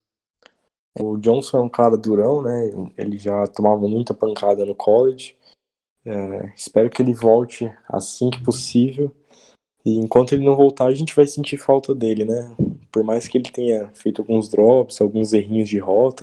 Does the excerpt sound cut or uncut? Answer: cut